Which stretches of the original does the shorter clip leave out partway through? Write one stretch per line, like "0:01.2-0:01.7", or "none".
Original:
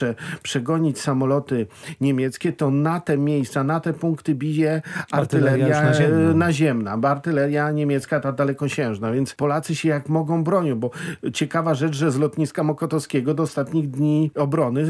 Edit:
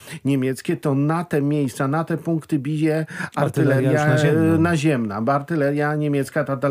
none